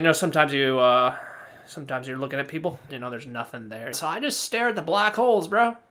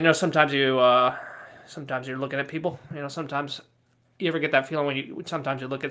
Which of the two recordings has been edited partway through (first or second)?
first